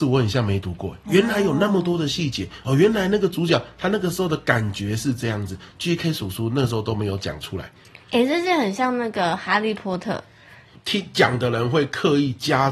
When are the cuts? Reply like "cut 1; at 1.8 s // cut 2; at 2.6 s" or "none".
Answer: cut 1; at 1.0 s // cut 2; at 10.7 s